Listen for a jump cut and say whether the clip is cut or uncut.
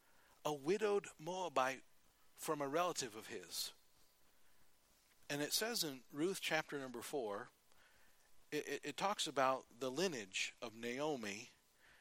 uncut